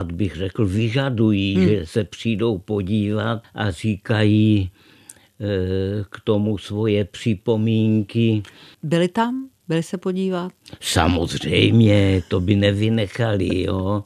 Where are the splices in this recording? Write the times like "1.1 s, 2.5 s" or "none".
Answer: 3.4 s, 8.7 s